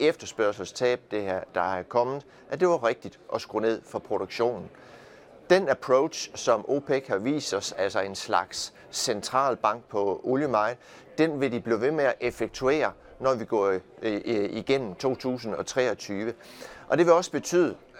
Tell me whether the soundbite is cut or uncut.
uncut